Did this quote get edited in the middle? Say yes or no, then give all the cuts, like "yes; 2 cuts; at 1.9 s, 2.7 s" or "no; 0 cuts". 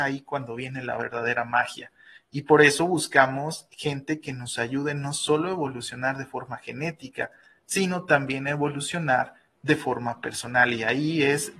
no; 0 cuts